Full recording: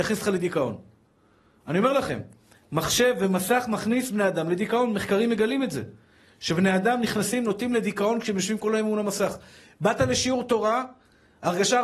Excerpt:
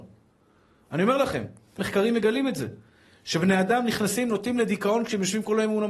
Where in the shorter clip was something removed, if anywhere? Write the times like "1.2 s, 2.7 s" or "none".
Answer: 1.8 s